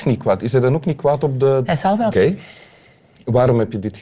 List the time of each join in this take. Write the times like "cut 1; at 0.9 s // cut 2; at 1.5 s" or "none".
cut 1; at 2.1 s